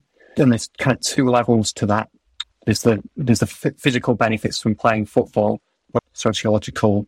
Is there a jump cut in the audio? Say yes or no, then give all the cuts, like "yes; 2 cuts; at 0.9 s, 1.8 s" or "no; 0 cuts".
yes; 2 cuts; at 2.4 s, 6.0 s